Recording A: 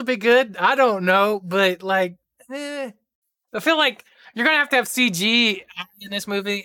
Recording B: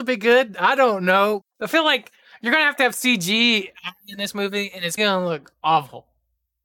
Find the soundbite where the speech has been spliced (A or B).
B